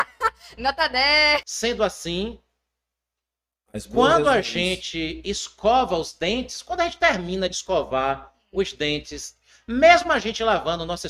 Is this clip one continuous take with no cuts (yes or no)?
no